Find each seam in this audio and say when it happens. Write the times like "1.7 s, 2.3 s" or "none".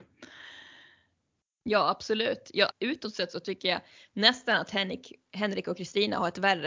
2.7 s

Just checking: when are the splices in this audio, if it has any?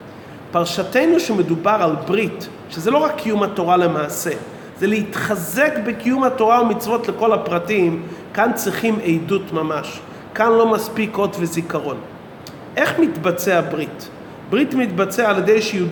none

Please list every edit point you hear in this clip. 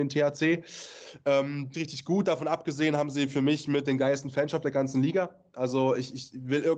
1.7 s, 3.8 s

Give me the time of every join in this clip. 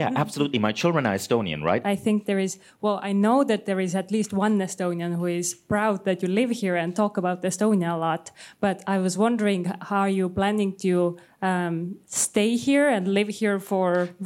1.8 s

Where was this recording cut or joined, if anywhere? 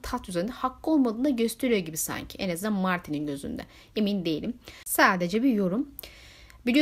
none

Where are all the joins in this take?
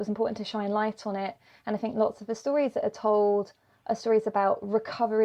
none

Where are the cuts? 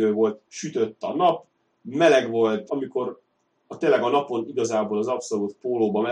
2.7 s

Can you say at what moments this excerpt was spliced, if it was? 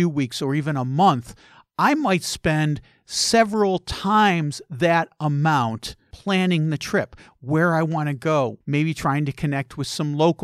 6.1 s, 8.6 s

